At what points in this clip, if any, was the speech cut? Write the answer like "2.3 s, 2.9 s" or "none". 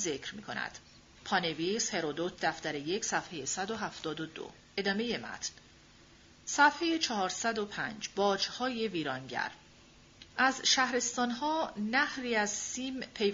1.1 s, 10.3 s